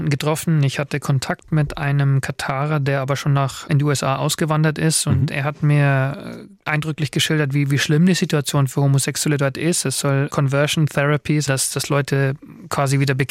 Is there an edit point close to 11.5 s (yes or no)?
yes